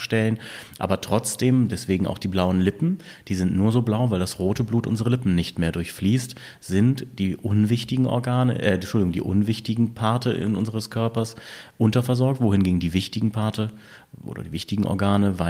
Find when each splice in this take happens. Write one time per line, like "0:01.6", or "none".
none